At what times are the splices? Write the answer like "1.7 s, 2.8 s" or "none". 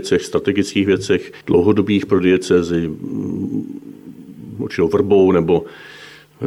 1.4 s, 4.5 s